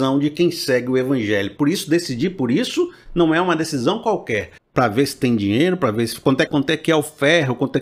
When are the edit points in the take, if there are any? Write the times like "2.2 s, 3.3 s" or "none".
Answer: 4.6 s, 6.5 s